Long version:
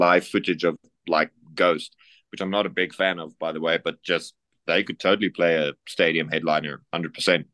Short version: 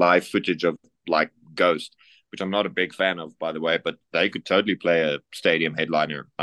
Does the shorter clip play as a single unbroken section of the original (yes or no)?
no